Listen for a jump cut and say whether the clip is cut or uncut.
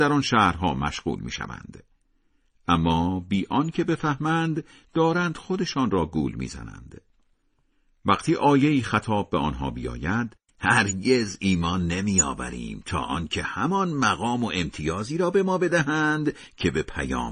cut